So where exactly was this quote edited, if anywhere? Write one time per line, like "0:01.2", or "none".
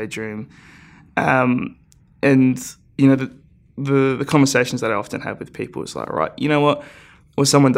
none